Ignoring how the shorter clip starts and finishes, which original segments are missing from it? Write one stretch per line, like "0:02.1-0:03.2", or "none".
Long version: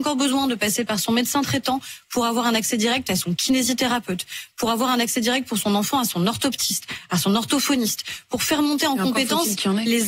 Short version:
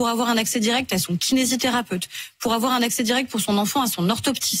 none